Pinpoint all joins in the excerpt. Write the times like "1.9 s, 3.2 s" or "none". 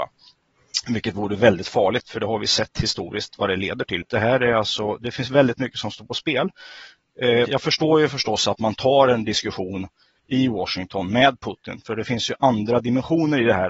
4.0 s, 7.4 s